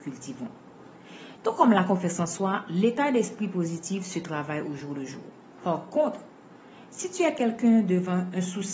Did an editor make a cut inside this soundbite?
yes; 2 cuts; at 1.4 s, 5.5 s

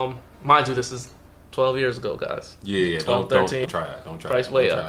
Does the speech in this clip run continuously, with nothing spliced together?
no; 1 cut; at 3.6 s

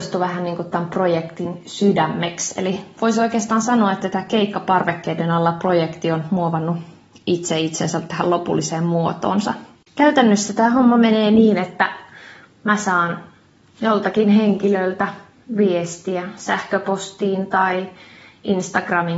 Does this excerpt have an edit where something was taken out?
yes; 1 cut; at 9.9 s

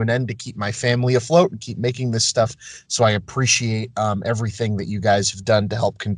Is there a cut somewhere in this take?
no; 0 cuts

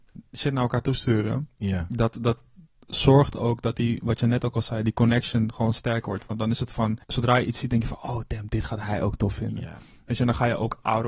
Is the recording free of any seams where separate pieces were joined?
no; 1 cut; at 7.0 s

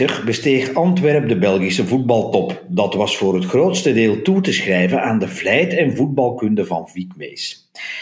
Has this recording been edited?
no; 0 cuts

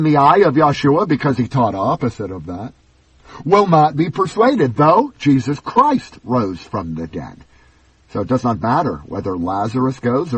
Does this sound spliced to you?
no; 0 cuts

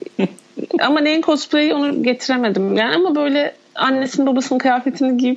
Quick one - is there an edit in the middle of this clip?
no; 0 cuts

